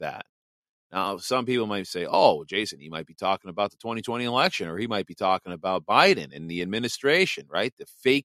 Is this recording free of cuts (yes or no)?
yes